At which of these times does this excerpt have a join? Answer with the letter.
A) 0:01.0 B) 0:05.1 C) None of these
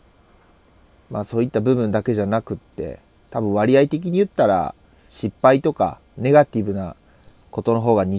B